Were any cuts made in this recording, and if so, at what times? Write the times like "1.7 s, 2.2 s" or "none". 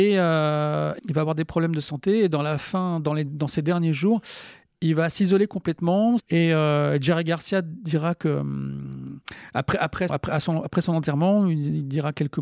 1.0 s, 6.2 s, 10.1 s